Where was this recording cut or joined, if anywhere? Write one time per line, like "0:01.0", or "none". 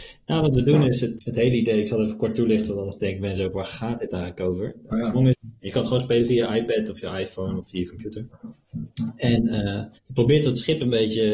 0:01.2
0:05.3
0:10.0